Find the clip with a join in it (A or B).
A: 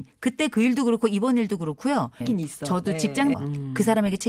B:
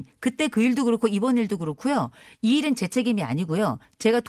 A